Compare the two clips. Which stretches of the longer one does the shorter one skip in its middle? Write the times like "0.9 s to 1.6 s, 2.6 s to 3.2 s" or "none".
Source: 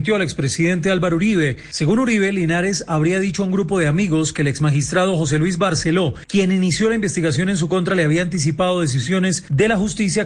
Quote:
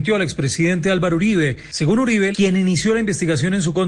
2.3 s to 6.3 s